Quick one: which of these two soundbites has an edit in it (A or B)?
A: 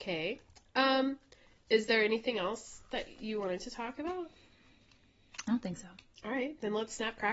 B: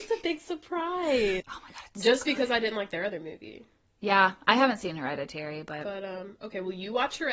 B